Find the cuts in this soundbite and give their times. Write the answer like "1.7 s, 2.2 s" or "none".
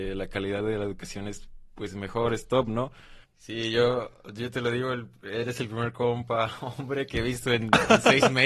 3.2 s

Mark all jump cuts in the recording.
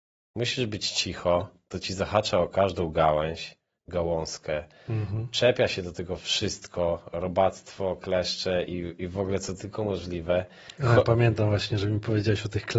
none

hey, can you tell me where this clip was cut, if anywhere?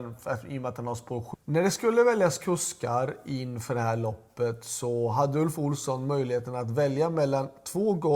1.3 s

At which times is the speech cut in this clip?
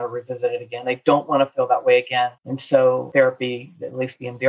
2.4 s

